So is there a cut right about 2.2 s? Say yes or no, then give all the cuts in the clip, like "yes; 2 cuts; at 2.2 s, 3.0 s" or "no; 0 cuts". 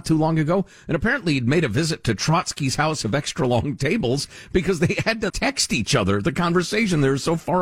no; 1 cut; at 5.3 s